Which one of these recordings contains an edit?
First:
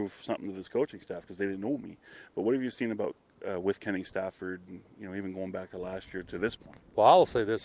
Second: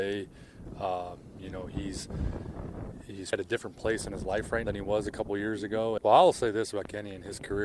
second; 3 cuts; at 3.3 s, 4.6 s, 6.0 s

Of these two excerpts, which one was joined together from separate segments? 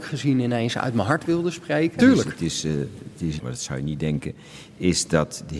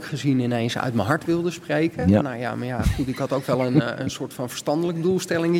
first; 2 cuts; at 2.0 s, 3.4 s

